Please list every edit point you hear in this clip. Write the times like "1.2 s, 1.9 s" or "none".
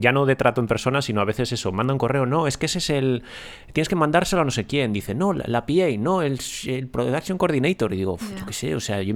none